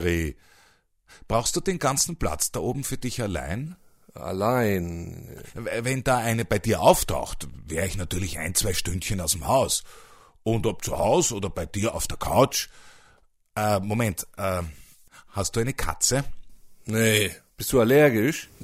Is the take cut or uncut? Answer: uncut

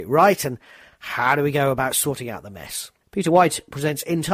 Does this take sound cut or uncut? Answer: cut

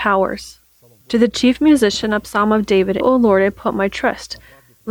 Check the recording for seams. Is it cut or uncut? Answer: cut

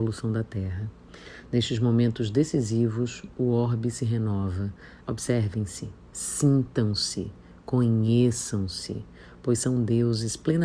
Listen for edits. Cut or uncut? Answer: cut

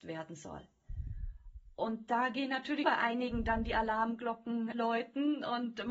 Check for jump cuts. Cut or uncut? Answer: cut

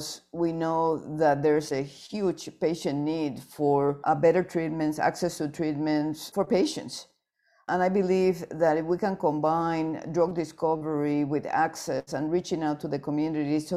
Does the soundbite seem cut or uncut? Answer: uncut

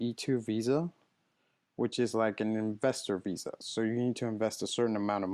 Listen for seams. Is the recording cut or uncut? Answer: uncut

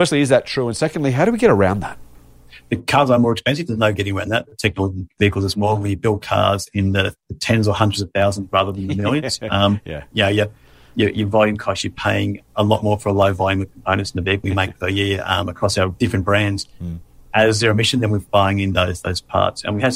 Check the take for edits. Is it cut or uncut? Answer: cut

